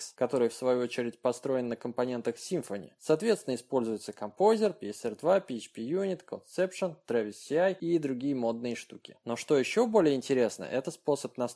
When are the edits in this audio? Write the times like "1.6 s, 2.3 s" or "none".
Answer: none